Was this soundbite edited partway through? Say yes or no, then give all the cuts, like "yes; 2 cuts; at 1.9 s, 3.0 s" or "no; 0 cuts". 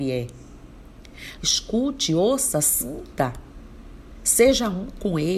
yes; 1 cut; at 1.4 s